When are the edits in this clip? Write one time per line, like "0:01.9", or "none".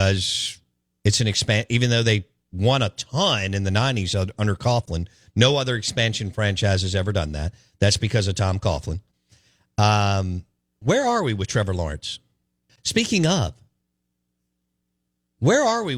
0:12.7